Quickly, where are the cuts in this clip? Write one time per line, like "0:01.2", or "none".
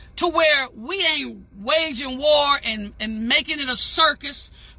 none